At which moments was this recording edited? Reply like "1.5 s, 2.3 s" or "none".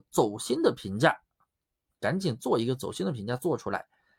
none